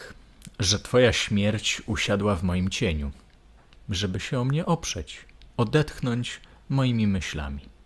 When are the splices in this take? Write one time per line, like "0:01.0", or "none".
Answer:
0:05.5

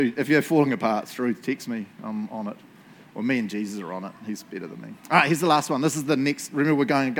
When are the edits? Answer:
none

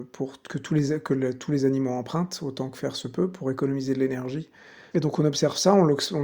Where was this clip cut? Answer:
0:04.9

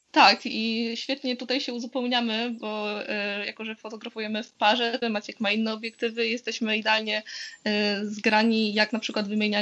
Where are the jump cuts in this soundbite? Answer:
0:05.0

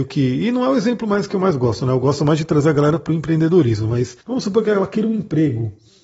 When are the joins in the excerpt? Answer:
0:04.2

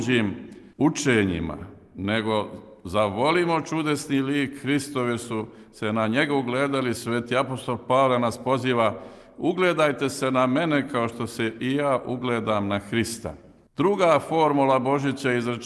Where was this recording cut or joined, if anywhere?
0:06.9

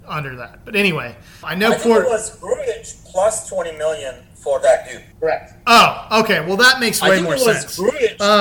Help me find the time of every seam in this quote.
0:01.4
0:05.1

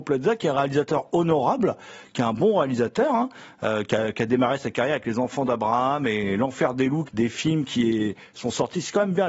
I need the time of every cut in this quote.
0:07.1

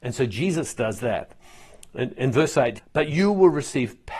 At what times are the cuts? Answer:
0:02.8

